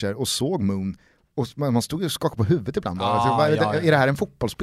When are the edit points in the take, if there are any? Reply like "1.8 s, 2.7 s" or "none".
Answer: none